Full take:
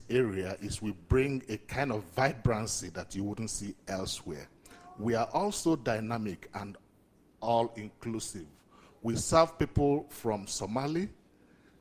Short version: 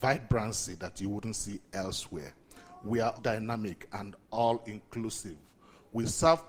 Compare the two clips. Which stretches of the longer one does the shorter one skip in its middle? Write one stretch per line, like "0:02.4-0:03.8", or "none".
0:05.3-0:05.8
0:06.8-0:07.3